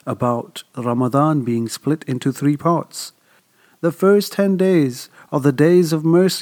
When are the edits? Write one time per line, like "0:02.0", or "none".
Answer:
none

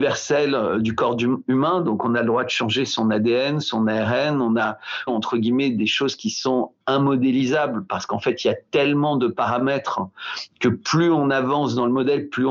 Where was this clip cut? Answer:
0:05.1

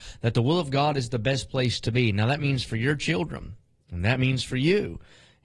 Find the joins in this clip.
none

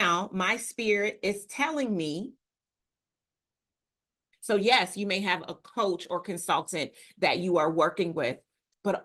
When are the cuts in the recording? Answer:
0:04.3

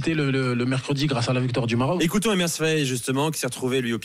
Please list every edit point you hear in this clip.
0:02.0

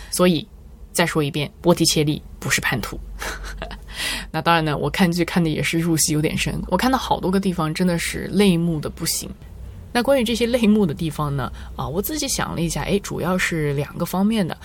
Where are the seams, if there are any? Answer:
none

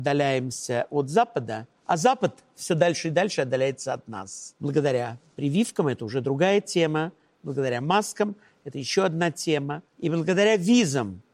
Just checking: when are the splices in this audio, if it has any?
0:01.8

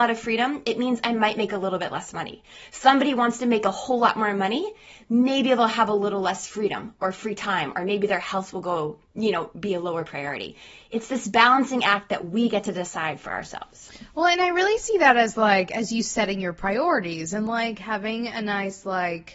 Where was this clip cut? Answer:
none

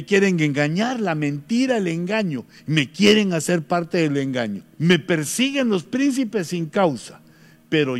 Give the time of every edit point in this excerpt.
0:02.6
0:04.7

